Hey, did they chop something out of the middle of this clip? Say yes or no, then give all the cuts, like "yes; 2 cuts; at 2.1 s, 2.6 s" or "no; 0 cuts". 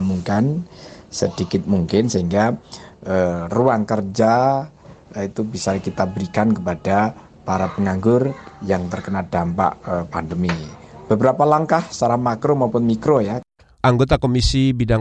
no; 0 cuts